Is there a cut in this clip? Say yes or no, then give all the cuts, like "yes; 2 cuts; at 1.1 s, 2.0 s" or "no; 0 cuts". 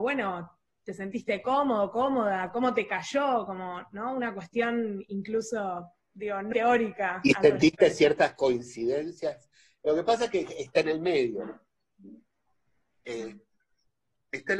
yes; 1 cut; at 6.5 s